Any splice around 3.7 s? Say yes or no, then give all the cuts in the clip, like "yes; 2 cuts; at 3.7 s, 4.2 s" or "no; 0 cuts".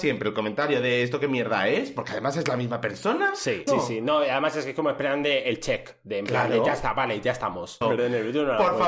yes; 2 cuts; at 3.7 s, 7.8 s